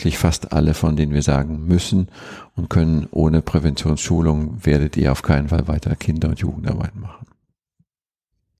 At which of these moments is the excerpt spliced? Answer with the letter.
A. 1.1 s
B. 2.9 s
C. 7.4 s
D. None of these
D